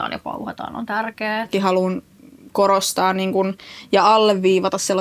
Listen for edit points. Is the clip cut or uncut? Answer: cut